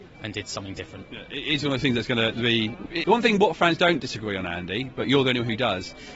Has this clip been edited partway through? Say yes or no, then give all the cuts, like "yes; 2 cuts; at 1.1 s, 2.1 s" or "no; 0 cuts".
yes; 1 cut; at 3.0 s